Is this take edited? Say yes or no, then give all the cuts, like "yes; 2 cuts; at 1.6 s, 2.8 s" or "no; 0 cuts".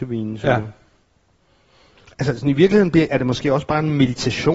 yes; 1 cut; at 3.1 s